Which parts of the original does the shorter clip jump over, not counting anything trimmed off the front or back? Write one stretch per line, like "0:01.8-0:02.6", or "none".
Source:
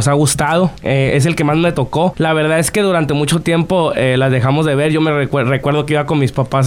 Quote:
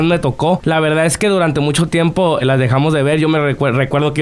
0:03.9-0:04.1